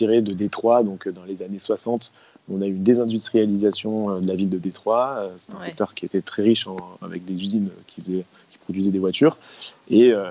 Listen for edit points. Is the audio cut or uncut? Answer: uncut